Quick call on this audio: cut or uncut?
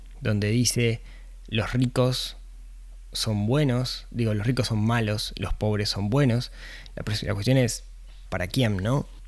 cut